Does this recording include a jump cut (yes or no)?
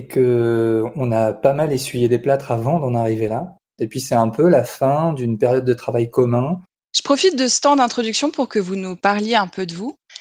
yes